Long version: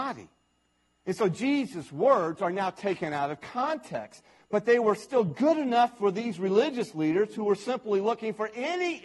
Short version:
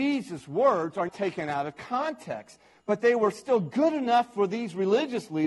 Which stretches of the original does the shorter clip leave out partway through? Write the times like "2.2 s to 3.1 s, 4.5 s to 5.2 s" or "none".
2.5 s to 2.7 s